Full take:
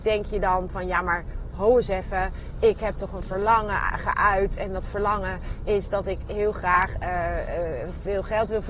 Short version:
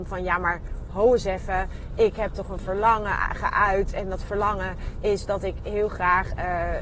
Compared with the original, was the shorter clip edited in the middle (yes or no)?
no